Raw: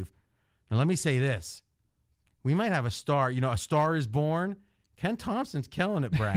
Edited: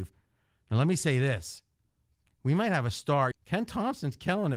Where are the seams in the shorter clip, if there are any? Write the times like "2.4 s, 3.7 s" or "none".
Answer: 3.3 s